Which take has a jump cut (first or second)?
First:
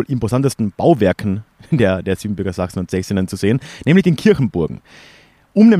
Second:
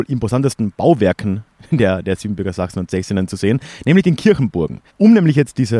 second